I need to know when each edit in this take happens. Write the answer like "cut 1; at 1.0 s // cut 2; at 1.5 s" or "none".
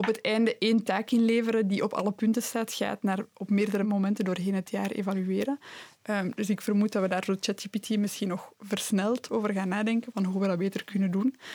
none

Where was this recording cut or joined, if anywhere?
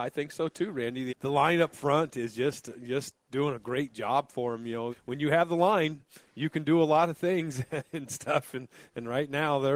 cut 1; at 1.1 s // cut 2; at 4.9 s

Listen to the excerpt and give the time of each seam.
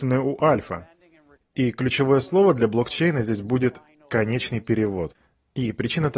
cut 1; at 1.4 s

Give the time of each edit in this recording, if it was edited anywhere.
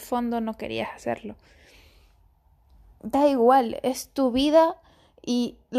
cut 1; at 3.0 s

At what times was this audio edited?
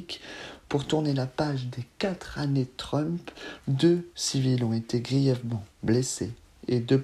cut 1; at 3.6 s

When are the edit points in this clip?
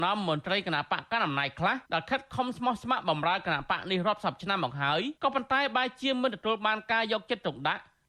cut 1; at 1.8 s // cut 2; at 5.2 s

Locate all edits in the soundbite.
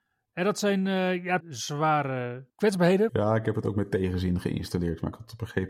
cut 1; at 1.4 s // cut 2; at 3.1 s

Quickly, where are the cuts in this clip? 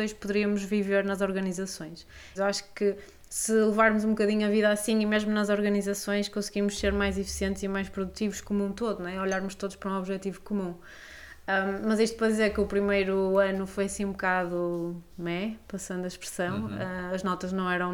cut 1; at 2.4 s

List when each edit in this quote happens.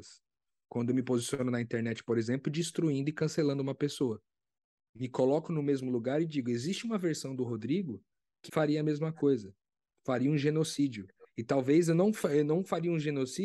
cut 1; at 4.8 s // cut 2; at 8.5 s

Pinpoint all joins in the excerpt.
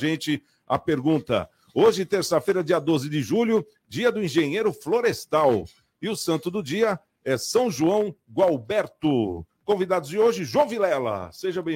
none

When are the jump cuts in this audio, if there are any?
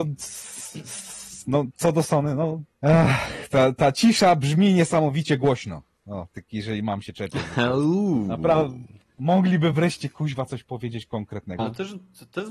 cut 1; at 2.7 s // cut 2; at 6.3 s // cut 3; at 11.6 s

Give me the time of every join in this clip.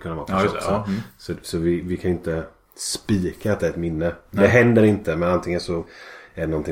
none

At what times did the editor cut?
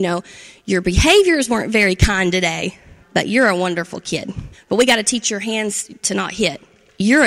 cut 1; at 3.0 s // cut 2; at 4.5 s

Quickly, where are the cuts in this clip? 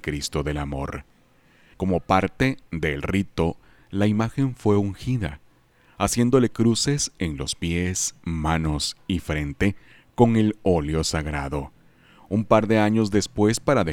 cut 1; at 1.7 s

